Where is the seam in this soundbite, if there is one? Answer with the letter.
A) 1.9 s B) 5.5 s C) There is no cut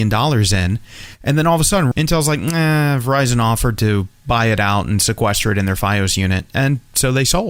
A